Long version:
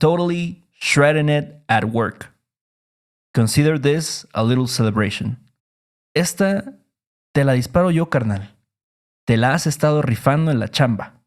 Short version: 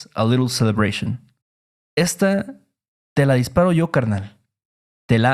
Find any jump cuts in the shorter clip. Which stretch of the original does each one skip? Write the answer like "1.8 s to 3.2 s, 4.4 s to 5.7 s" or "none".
none